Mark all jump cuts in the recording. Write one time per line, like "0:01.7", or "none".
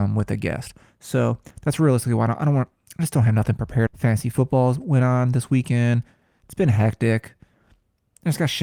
0:03.9